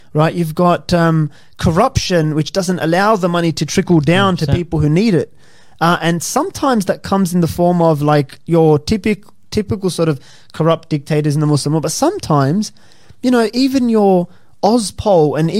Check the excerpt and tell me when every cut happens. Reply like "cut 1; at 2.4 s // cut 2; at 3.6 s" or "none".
none